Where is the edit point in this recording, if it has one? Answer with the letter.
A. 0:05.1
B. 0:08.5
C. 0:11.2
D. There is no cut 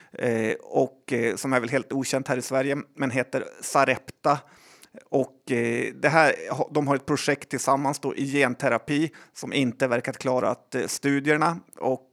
D